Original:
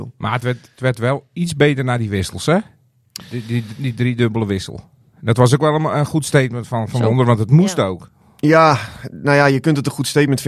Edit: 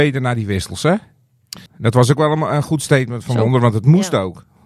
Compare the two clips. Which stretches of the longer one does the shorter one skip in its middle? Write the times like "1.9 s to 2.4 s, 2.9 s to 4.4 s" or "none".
3.3 s to 5.1 s, 6.7 s to 6.9 s

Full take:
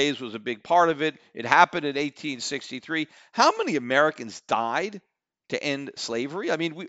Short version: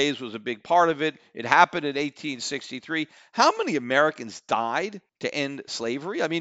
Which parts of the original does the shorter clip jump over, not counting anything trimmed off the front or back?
5.1 s to 5.4 s

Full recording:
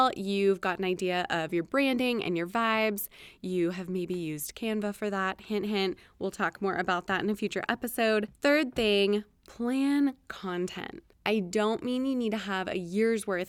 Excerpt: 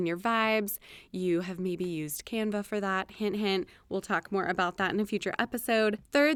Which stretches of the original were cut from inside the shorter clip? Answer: none

